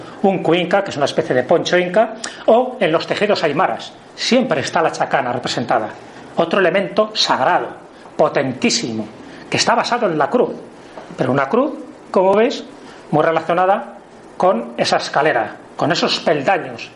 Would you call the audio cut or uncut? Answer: uncut